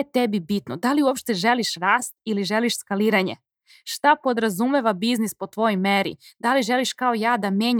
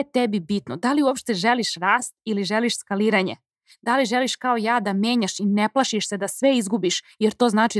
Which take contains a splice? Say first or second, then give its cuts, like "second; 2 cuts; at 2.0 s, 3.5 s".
second; 1 cut; at 3.7 s